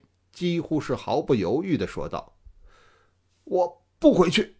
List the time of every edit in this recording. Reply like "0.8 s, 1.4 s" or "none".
none